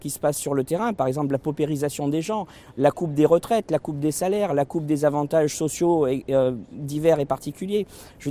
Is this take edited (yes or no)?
no